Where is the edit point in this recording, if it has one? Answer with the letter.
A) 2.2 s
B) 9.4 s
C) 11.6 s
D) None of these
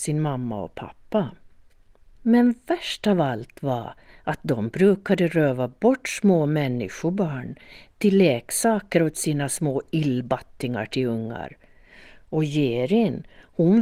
A